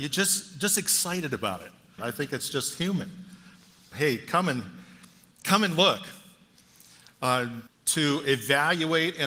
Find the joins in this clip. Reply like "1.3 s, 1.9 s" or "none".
2.0 s, 3.9 s, 7.7 s